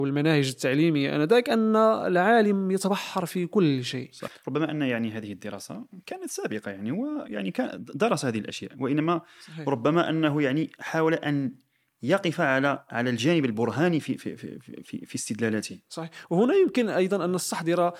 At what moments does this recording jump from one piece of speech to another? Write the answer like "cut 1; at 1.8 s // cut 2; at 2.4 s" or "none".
cut 1; at 4.3 s